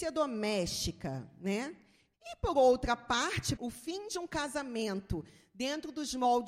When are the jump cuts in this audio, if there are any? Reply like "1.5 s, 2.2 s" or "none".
2.1 s, 3.6 s